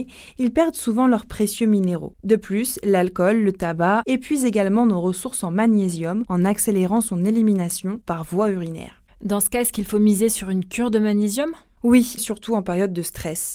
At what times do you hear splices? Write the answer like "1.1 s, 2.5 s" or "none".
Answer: 4.0 s, 12.2 s